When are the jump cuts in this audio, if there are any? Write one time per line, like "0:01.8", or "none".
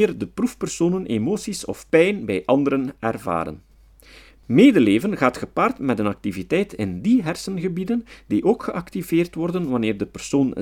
none